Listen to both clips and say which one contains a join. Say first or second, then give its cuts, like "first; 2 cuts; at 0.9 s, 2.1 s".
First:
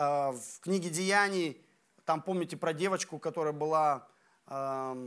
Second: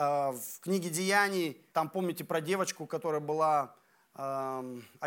second; 1 cut; at 1.7 s